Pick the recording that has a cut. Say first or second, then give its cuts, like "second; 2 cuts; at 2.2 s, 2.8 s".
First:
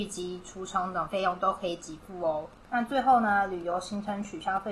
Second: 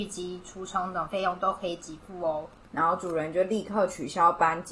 second; 1 cut; at 2.7 s